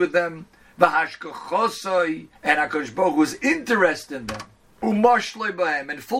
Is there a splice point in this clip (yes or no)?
yes